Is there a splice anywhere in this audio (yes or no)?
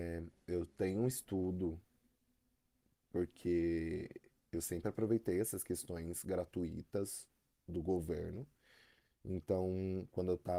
no